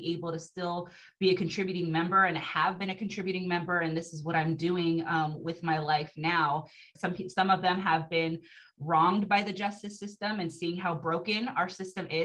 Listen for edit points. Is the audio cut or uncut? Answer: cut